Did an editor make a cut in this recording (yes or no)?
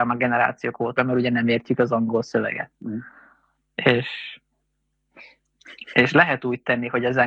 yes